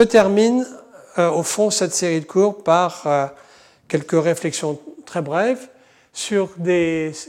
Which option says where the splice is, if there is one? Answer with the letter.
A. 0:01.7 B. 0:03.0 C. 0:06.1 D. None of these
D